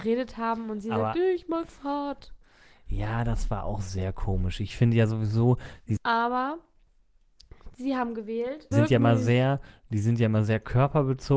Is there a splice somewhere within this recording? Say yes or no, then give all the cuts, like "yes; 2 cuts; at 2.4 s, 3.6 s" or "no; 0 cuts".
yes; 2 cuts; at 6.0 s, 8.7 s